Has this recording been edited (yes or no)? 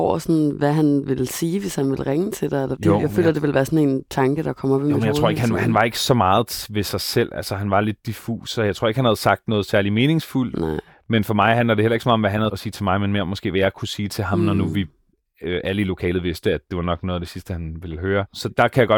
yes